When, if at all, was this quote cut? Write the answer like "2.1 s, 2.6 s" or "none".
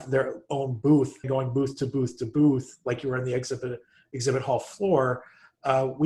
1.2 s